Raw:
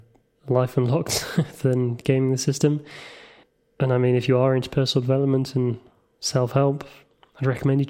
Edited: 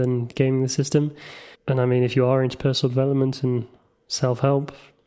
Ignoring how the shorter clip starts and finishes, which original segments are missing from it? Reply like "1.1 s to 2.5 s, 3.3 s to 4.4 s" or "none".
3.2 s to 3.7 s